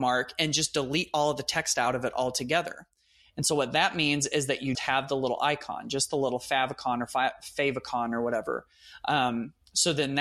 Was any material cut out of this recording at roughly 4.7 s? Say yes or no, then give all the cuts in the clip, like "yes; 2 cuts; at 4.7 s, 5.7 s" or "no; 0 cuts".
yes; 1 cut; at 4.7 s